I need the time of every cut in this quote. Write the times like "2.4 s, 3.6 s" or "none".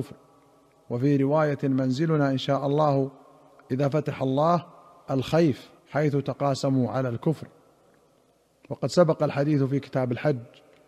5.8 s